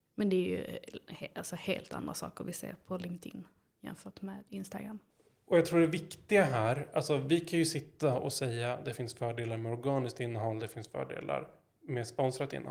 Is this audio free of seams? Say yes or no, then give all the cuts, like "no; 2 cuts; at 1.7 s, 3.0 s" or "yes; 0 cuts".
yes; 0 cuts